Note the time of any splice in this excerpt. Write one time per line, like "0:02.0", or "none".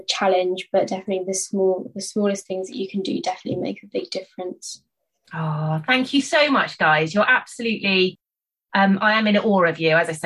none